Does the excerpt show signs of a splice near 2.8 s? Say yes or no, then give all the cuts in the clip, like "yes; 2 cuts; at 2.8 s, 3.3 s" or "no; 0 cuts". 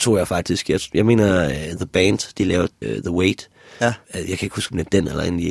yes; 2 cuts; at 2.8 s, 4.0 s